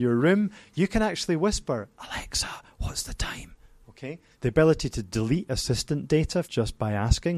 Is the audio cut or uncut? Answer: cut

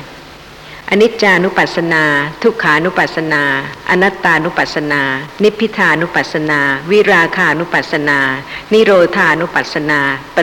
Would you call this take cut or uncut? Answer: uncut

